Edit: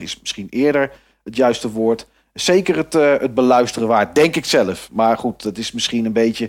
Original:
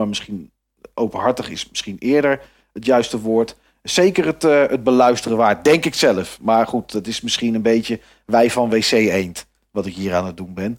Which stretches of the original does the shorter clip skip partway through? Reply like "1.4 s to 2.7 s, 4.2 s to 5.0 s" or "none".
none